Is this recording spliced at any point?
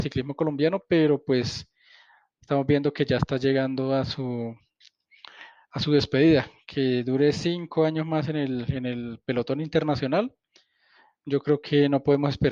no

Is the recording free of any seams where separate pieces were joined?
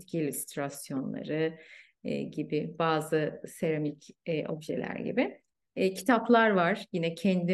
yes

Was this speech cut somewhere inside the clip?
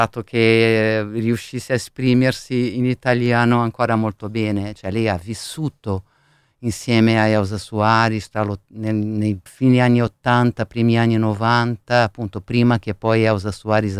yes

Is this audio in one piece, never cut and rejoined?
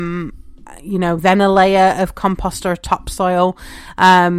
yes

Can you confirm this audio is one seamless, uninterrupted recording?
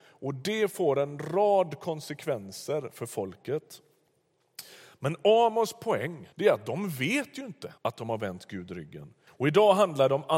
no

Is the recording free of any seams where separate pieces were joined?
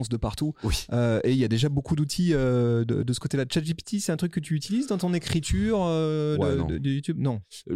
yes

